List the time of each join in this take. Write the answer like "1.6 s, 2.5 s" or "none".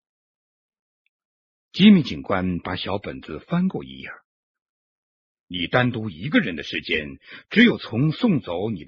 5.3 s